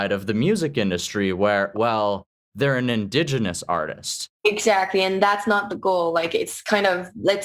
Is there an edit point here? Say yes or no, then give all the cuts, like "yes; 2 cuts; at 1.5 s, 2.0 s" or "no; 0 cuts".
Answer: yes; 2 cuts; at 1.7 s, 4.4 s